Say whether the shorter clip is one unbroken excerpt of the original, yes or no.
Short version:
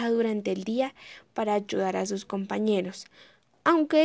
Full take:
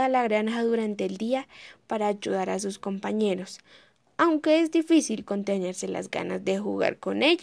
yes